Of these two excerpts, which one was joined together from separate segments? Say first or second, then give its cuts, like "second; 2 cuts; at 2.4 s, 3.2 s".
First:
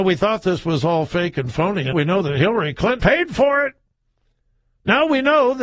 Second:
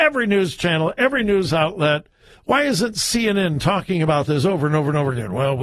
first; 2 cuts; at 1.9 s, 3.0 s